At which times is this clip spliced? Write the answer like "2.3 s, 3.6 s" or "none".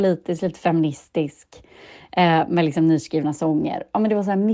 none